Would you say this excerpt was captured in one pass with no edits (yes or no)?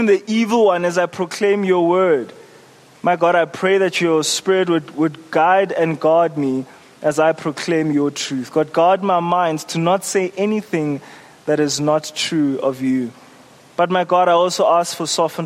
yes